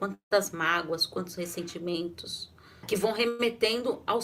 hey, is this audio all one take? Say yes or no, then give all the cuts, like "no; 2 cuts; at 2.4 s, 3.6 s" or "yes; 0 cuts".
no; 1 cut; at 2.8 s